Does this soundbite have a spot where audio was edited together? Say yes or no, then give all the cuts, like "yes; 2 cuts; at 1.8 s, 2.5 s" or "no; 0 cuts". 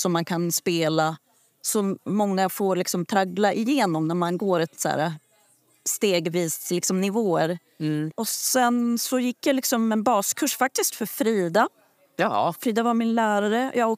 yes; 1 cut; at 8.1 s